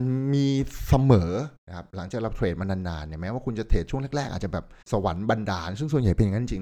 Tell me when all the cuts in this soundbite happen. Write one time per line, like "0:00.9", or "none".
0:01.6
0:04.8